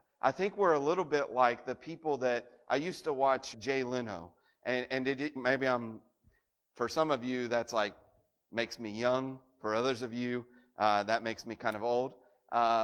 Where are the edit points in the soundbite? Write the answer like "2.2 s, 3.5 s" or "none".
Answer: 3.5 s, 5.4 s

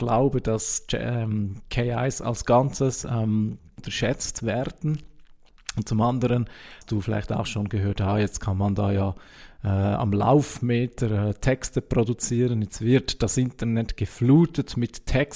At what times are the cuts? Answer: none

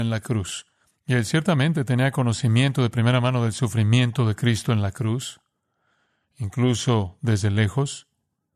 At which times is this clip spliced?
0.9 s

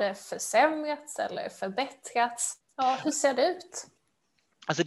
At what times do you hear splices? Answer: none

